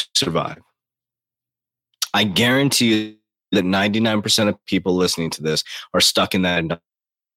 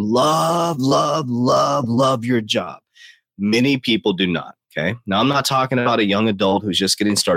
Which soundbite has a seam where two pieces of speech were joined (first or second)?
first